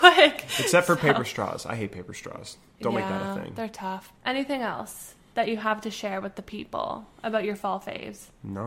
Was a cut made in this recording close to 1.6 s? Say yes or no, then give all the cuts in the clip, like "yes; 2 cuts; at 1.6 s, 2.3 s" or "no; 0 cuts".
no; 1 cut; at 4.2 s